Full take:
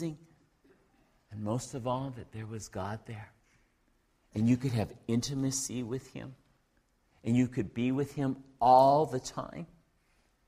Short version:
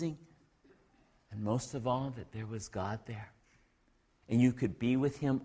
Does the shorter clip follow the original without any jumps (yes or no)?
no